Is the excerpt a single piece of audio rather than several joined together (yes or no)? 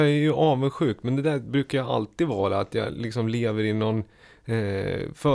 yes